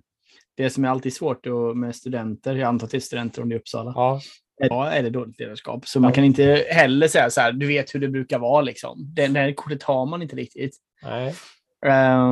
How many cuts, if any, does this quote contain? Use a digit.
1